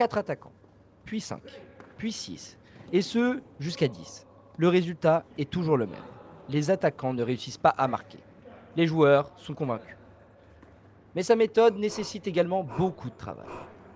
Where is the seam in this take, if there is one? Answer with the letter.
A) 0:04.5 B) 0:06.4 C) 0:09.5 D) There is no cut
C